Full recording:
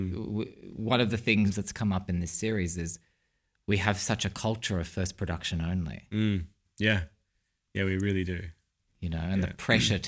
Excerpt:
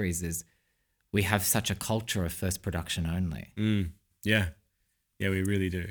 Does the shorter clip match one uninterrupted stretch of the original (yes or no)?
yes